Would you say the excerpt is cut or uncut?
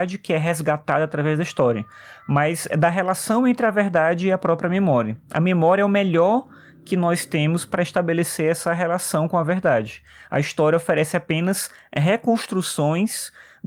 uncut